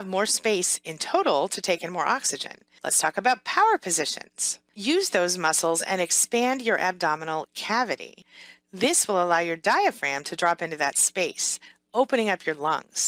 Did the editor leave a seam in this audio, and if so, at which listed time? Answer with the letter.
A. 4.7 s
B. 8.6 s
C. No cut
A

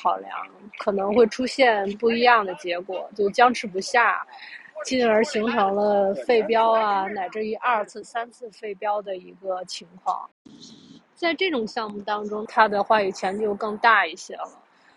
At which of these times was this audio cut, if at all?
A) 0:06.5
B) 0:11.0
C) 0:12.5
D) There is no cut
C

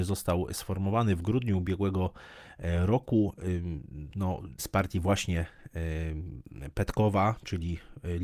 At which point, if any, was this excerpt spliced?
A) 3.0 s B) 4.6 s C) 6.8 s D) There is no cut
B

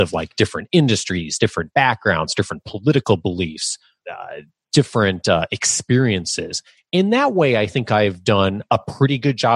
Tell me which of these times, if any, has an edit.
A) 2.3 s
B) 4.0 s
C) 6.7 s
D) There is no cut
B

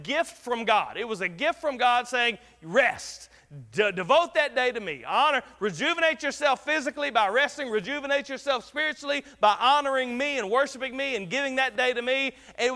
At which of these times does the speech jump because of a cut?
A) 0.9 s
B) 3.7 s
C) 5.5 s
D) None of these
D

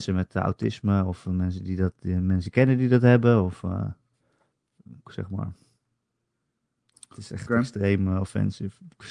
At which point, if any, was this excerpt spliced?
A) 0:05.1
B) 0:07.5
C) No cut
A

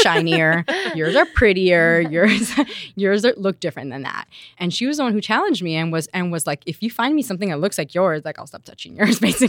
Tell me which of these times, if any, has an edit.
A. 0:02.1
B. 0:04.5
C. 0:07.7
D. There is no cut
B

